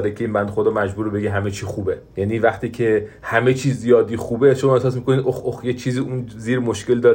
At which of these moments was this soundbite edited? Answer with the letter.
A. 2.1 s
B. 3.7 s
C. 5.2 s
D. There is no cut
A